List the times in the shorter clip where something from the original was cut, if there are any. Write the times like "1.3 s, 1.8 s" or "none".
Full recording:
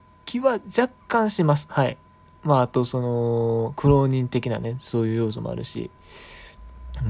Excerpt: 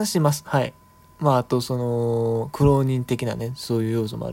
none